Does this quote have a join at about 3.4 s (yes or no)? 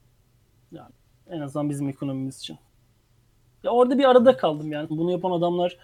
no